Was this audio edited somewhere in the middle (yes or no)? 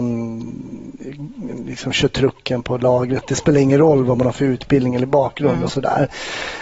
no